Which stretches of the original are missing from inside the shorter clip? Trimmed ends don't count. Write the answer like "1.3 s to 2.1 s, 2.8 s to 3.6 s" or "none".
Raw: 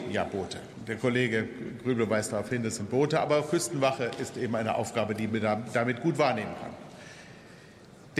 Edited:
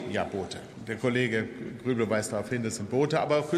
none